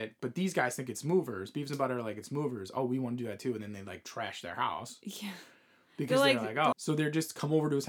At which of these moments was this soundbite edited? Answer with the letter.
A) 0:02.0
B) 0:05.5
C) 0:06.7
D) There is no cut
C